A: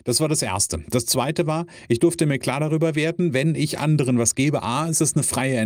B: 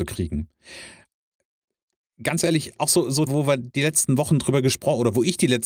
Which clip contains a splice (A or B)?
B